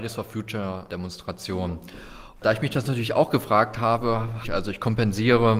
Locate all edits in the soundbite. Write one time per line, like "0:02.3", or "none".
0:02.4
0:04.4